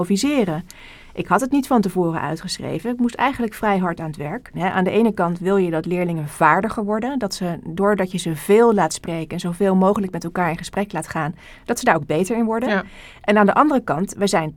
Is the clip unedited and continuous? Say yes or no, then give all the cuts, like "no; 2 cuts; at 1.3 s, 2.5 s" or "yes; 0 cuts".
no; 1 cut; at 4.5 s